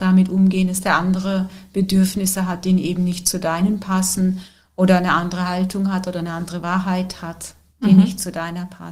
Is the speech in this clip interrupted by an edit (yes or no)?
no